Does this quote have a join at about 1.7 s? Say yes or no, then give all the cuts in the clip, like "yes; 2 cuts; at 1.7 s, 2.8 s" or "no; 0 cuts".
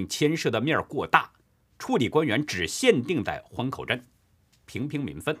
no; 0 cuts